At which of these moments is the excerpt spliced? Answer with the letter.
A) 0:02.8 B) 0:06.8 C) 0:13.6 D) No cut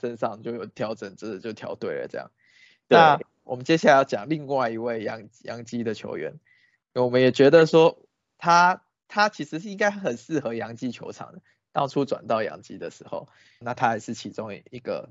C